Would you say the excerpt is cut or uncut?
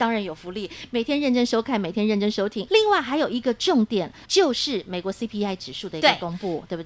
cut